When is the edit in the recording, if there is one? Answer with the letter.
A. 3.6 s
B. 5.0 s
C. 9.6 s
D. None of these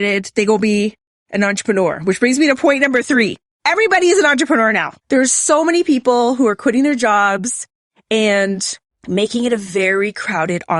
B